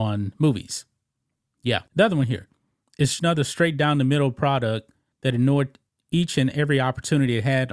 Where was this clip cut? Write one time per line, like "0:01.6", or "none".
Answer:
0:01.9
0:03.2